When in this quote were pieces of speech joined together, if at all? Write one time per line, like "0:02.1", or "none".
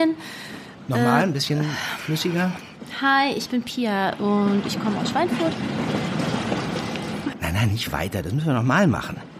0:07.3